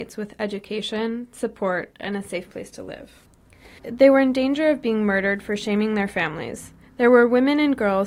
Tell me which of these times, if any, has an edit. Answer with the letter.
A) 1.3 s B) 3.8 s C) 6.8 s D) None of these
B